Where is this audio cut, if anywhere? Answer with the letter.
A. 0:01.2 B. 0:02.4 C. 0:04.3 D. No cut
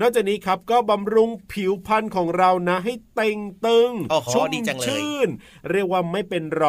C